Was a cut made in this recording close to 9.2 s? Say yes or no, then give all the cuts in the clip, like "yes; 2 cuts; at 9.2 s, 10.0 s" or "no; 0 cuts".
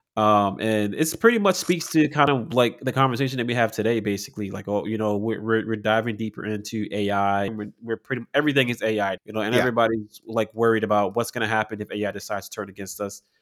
yes; 2 cuts; at 7.5 s, 9.2 s